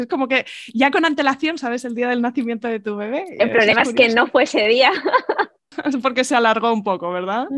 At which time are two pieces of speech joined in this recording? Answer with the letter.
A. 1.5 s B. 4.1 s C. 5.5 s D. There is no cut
D